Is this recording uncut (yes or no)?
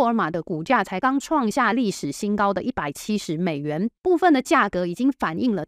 no